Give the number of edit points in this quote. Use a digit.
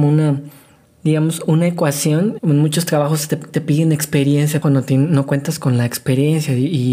1